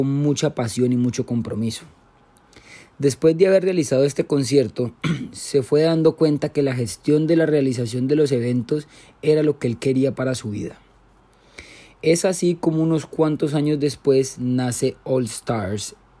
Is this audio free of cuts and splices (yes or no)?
yes